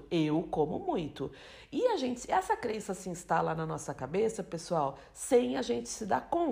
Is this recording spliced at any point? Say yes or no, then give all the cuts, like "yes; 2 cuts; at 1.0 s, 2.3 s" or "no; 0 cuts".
no; 0 cuts